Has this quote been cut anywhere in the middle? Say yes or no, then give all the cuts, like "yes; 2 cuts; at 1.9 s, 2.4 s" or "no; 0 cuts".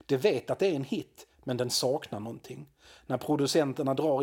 no; 0 cuts